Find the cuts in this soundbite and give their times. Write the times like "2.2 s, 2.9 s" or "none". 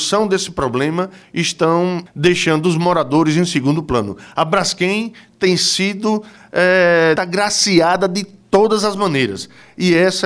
2.1 s, 7.2 s

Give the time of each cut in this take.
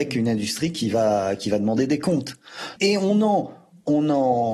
2.8 s

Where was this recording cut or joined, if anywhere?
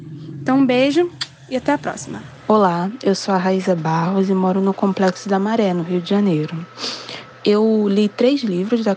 7.3 s

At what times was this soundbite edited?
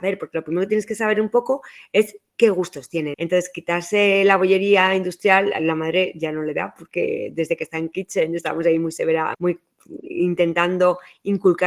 3.1 s, 9.3 s

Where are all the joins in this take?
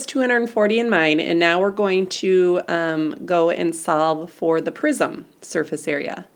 none

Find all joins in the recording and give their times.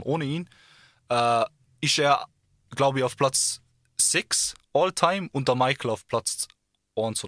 none

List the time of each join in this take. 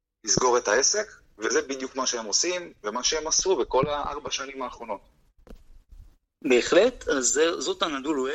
none

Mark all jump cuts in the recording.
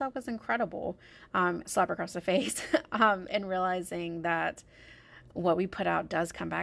1.6 s

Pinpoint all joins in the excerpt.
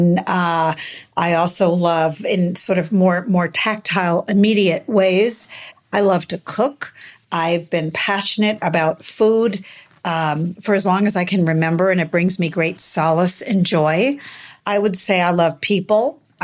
14.6 s

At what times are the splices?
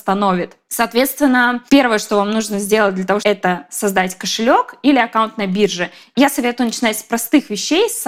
1.7 s, 3.2 s

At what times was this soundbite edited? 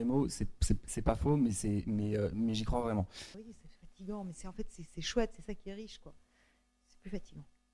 3.3 s

